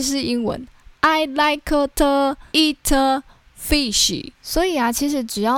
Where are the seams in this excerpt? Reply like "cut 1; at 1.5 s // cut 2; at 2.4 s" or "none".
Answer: cut 1; at 2.5 s // cut 2; at 4.3 s